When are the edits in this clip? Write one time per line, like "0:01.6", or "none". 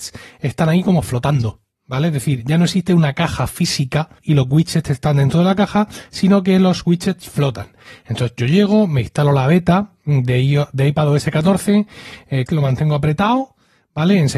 0:04.2
0:12.5